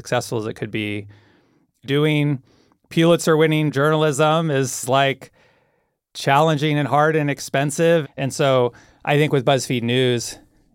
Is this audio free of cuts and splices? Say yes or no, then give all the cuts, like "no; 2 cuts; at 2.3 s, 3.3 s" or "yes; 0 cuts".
no; 1 cut; at 8.0 s